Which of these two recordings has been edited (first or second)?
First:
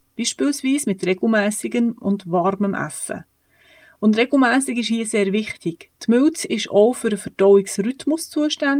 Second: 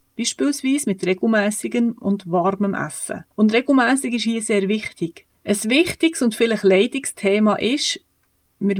second